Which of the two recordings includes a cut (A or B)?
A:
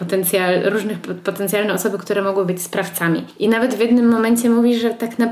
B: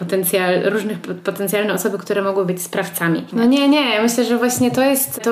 B